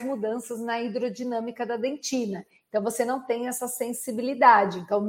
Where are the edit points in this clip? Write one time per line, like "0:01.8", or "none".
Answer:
none